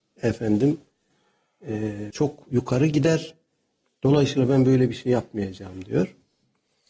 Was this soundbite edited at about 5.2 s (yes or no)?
no